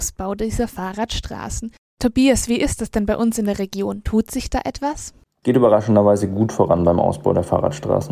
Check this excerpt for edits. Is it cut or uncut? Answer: uncut